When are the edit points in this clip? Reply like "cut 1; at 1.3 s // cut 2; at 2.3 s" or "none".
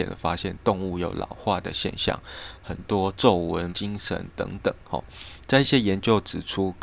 cut 1; at 3.7 s // cut 2; at 4.8 s